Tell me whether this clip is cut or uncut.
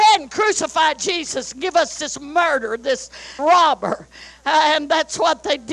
cut